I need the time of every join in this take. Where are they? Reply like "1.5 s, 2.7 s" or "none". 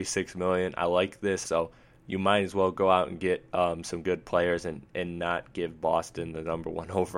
1.4 s